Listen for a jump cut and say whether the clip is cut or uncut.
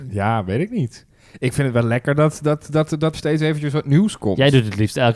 cut